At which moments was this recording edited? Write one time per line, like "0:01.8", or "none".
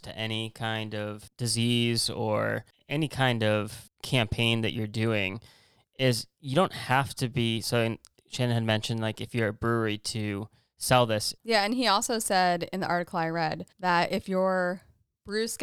0:11.4
0:13.7

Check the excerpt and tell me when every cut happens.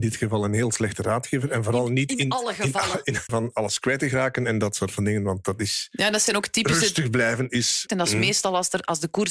0:03.3
0:07.9

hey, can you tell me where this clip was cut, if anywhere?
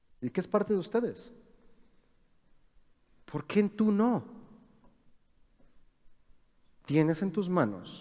none

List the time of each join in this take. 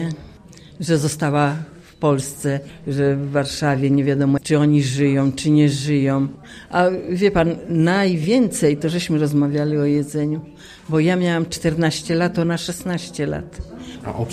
0:04.4

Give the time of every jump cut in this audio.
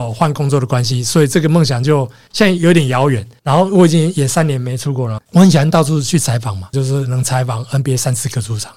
0:05.2
0:06.7

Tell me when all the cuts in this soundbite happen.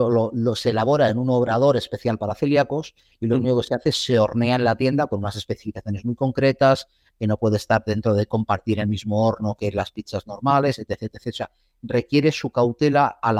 none

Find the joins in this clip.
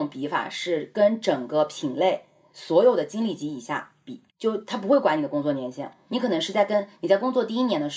0:04.3

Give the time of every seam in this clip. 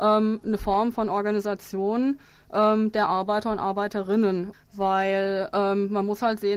0:04.5

